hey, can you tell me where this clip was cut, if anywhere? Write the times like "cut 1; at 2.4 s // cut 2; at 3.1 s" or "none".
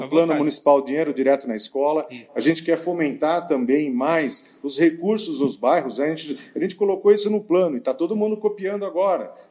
cut 1; at 2.3 s